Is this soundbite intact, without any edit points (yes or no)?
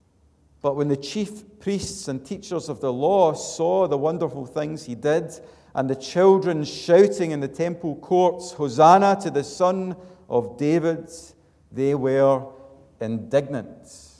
yes